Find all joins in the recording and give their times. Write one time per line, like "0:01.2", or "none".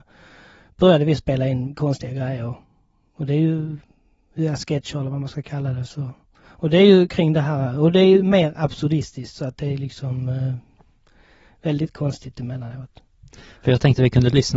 none